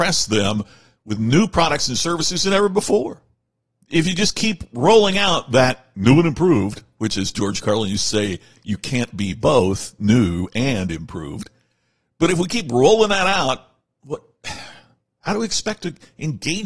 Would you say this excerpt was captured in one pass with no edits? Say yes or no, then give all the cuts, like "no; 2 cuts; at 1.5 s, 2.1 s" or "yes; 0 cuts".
yes; 0 cuts